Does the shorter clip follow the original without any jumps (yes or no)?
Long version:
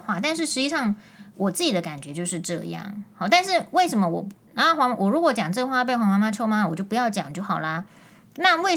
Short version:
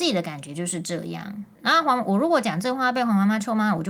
no